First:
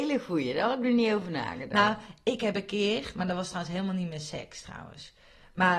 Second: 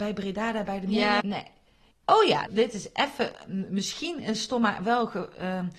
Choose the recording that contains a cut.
second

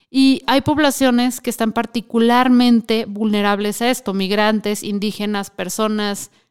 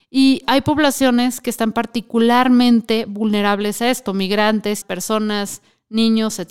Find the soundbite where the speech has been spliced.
second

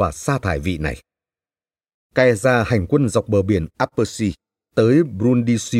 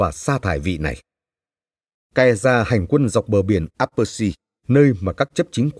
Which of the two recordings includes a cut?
second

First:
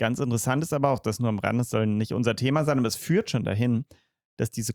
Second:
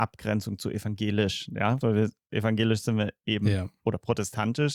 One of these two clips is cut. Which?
second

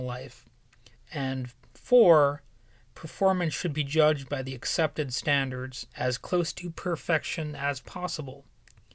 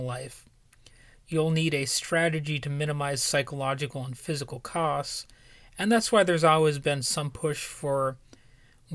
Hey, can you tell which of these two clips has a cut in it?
first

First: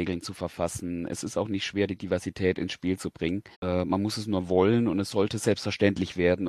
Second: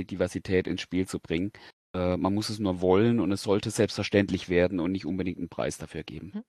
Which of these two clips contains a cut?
first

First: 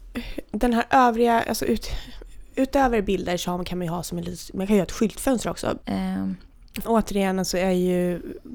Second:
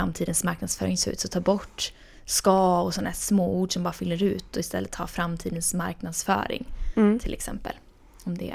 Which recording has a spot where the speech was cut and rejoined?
first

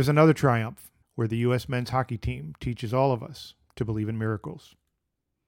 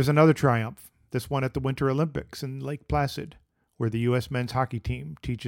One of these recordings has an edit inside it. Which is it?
first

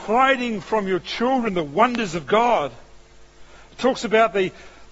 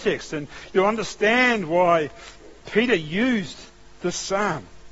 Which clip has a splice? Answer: second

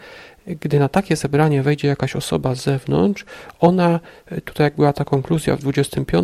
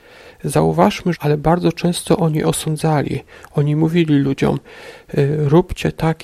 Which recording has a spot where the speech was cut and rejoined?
second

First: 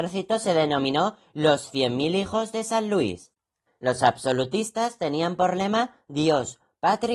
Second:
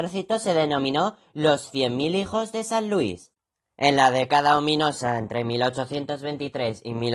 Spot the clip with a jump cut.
first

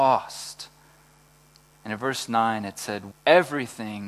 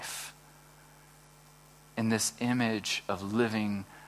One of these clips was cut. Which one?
first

